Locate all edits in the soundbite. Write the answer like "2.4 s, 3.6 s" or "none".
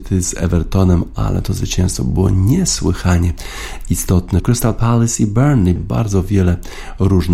4.4 s, 5.8 s